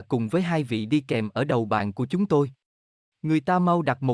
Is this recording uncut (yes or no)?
yes